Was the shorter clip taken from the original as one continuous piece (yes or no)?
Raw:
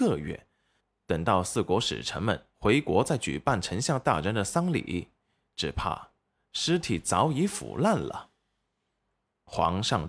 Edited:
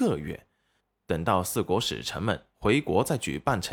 yes